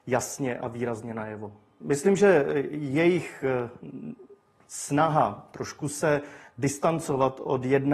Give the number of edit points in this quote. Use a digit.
1